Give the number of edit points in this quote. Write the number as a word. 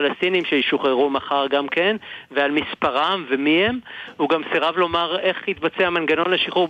zero